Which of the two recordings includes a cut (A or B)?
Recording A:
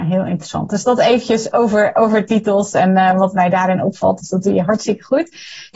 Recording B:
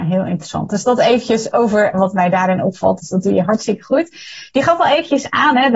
B